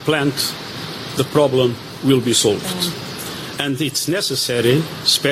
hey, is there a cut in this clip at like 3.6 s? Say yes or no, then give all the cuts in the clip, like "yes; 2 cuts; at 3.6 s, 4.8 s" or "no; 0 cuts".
yes; 1 cut; at 3.6 s